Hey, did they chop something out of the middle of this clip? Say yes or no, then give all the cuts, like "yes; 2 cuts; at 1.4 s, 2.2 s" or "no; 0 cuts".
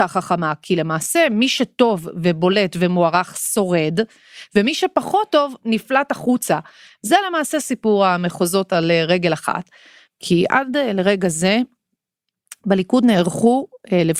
yes; 1 cut; at 10.1 s